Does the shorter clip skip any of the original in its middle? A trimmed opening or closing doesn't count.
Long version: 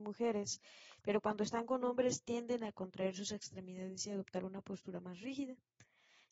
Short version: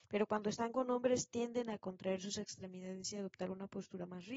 no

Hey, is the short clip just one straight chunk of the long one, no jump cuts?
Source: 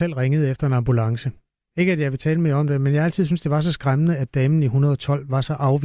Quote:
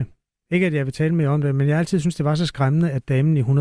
yes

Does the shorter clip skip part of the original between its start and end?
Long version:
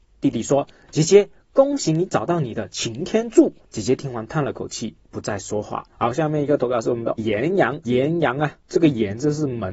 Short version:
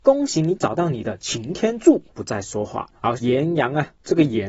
yes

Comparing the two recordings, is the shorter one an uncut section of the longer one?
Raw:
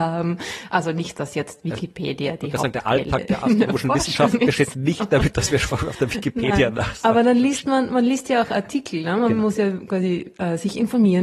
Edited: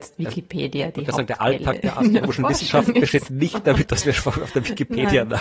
yes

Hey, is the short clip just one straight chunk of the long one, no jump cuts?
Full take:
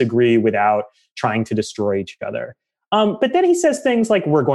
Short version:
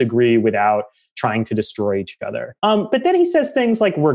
no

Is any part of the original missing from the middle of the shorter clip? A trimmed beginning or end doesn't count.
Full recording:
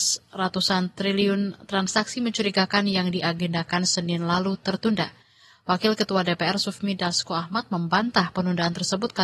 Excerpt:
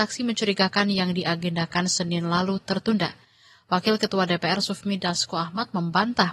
no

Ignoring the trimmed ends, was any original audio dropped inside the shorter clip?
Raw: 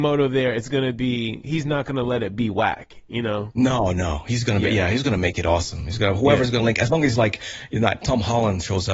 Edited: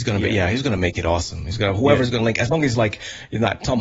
no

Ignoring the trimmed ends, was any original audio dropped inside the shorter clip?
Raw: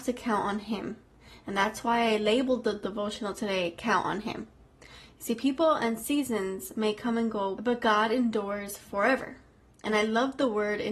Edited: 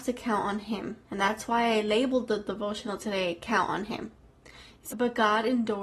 yes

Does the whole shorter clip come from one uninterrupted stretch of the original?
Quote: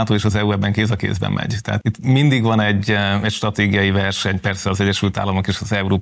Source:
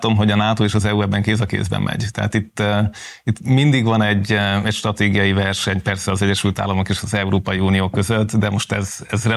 no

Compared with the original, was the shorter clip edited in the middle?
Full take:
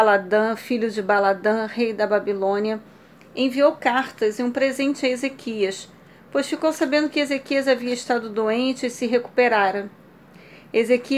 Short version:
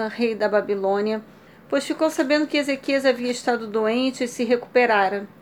yes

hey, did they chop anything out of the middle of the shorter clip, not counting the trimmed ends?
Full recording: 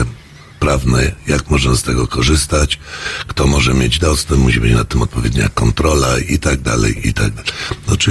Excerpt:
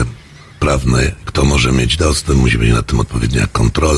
yes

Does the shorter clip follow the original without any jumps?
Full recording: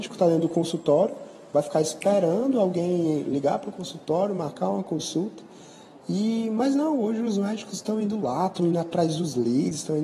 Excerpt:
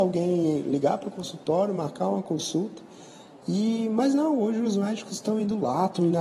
yes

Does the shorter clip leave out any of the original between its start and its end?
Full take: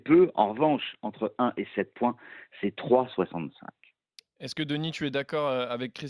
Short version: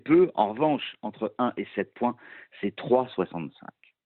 no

